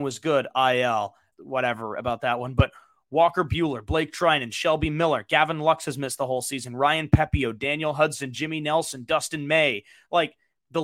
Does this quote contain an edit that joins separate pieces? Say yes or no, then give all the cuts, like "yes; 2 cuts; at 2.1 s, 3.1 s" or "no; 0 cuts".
yes; 1 cut; at 1.3 s